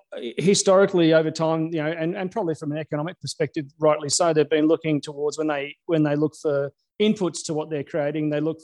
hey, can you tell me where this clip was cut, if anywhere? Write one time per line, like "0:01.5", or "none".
none